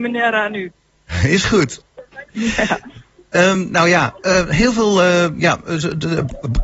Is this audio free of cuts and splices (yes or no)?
yes